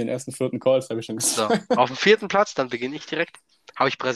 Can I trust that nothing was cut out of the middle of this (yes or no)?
yes